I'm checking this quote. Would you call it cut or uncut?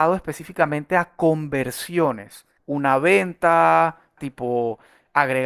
cut